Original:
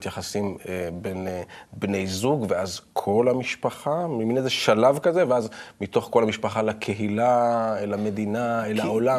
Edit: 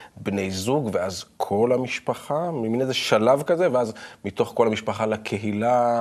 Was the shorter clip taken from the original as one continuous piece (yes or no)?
yes